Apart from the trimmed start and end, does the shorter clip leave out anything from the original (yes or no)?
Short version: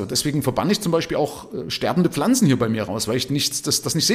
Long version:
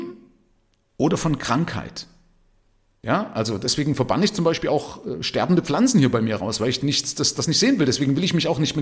no